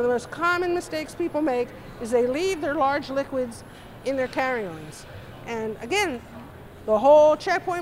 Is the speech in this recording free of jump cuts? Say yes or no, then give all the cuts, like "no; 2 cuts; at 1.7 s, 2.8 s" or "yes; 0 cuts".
yes; 0 cuts